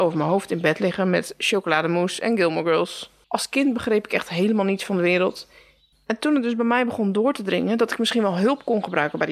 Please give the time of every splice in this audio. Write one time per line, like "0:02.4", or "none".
0:03.2
0:05.9